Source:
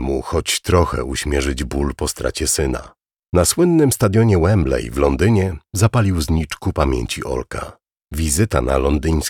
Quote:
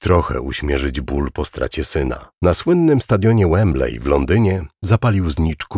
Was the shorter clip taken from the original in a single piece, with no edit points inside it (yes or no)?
no